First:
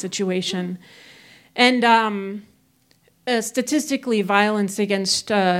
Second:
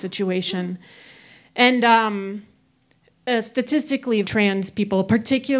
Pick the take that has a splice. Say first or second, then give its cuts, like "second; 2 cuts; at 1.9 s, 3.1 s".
second; 1 cut; at 4.2 s